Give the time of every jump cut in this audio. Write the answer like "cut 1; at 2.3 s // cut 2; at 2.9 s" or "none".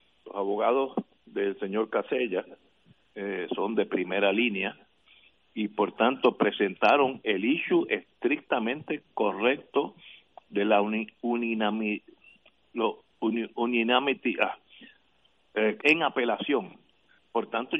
cut 1; at 15.8 s